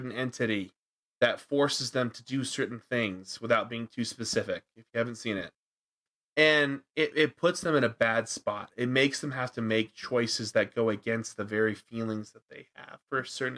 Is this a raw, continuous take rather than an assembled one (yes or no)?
yes